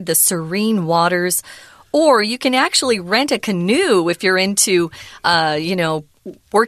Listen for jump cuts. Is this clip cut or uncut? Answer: uncut